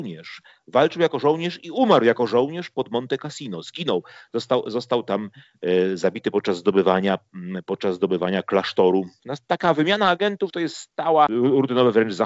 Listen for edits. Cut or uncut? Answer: cut